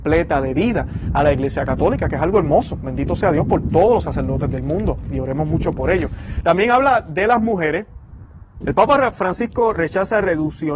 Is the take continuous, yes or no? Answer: no